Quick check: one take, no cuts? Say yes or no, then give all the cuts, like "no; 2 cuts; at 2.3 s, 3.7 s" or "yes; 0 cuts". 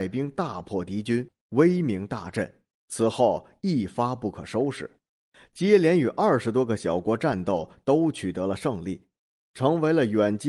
yes; 0 cuts